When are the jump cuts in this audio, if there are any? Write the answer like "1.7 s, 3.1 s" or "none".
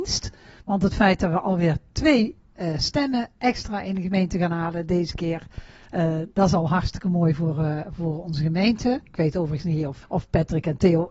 10.0 s